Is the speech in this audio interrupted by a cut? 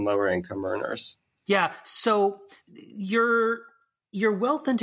yes; 2 cuts; at 1.5 s, 2.6 s

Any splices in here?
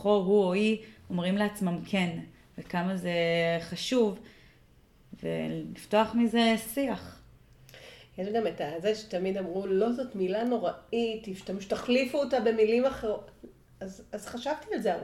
no; 0 cuts

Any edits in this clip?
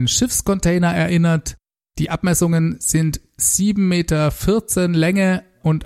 no; 0 cuts

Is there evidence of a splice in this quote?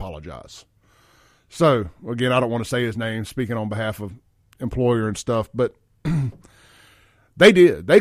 no; 0 cuts

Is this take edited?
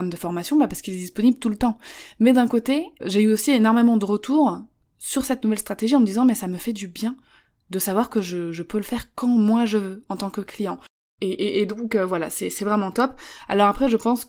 yes; 1 cut; at 3.0 s

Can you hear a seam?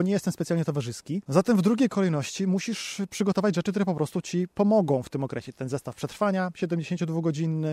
yes; 1 cut; at 1.2 s

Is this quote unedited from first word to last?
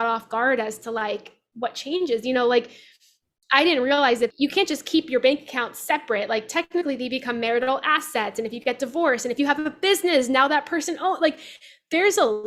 no; 1 cut; at 4.3 s

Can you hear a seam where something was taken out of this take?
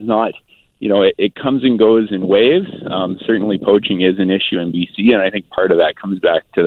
no; 0 cuts

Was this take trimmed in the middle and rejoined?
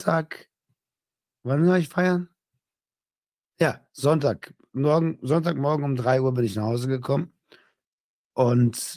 no; 0 cuts

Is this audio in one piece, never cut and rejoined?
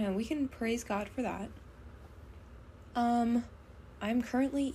yes; 0 cuts

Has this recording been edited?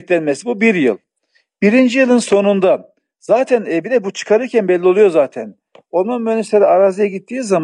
no; 0 cuts

